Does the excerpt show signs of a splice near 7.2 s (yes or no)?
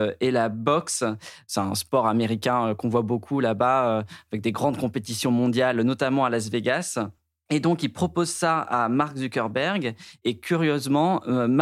no